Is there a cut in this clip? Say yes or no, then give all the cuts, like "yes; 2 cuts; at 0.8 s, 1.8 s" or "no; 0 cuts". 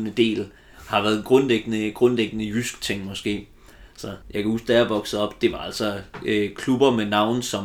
yes; 1 cut; at 4.2 s